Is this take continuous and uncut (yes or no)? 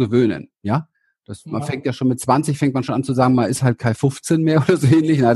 yes